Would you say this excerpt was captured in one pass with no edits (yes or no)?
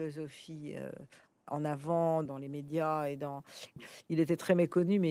no